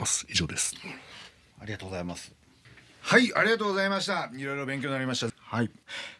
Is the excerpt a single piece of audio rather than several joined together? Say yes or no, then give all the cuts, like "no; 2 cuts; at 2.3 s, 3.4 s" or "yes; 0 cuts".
no; 1 cut; at 5.3 s